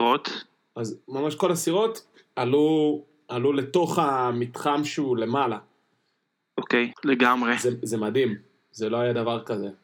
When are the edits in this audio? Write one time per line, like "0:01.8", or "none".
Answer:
0:06.9